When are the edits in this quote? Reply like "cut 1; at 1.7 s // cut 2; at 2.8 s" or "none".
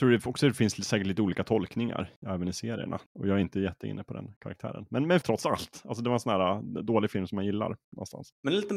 cut 1; at 3.1 s // cut 2; at 5.2 s

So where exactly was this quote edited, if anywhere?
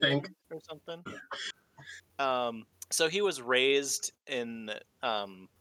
cut 1; at 1.1 s

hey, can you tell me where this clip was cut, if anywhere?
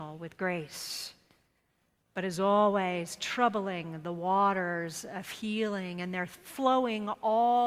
none

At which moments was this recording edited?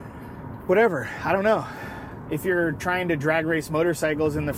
none

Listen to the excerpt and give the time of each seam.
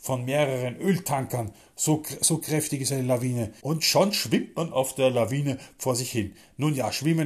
cut 1; at 3.6 s

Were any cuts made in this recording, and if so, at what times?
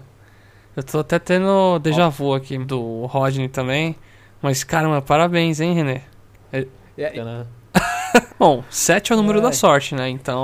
cut 1; at 2.6 s // cut 2; at 7.2 s // cut 3; at 8.3 s

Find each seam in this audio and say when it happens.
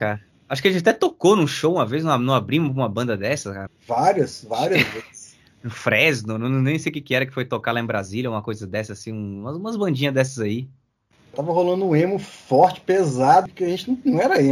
cut 1; at 3.7 s // cut 2; at 11.3 s // cut 3; at 13.5 s

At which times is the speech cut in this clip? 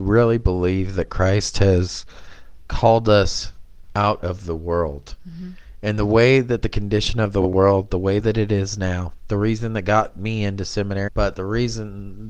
cut 1; at 11.1 s

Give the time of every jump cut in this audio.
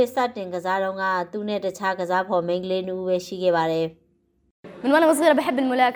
none

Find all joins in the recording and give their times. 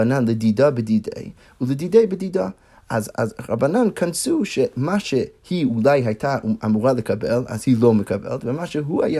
cut 1; at 3.1 s

